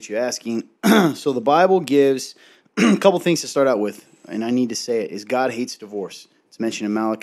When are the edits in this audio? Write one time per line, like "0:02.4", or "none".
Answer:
none